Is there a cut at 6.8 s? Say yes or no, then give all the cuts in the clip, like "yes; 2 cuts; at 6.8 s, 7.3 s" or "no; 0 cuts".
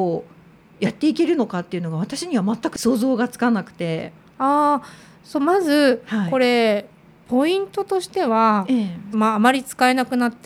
no; 1 cut; at 9.1 s